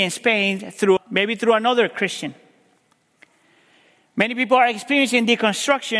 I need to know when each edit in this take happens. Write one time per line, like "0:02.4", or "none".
0:01.0